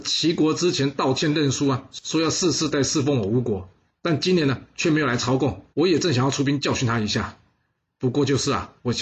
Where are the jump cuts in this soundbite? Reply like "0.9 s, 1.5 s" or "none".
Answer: 2.7 s, 5.7 s